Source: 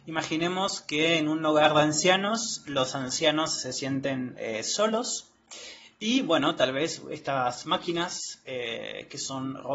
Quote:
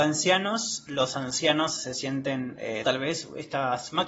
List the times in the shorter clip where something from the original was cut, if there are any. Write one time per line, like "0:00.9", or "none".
0:02.8